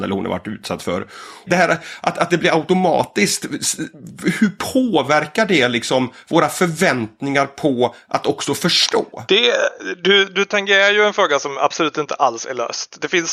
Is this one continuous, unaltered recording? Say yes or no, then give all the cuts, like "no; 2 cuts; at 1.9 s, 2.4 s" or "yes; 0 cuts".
no; 1 cut; at 1.5 s